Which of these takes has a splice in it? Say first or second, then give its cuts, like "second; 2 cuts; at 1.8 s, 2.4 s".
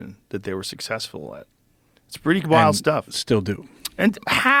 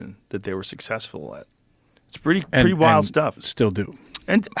first; 1 cut; at 2.4 s